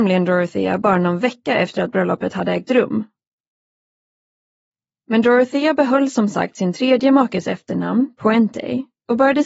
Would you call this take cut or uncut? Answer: uncut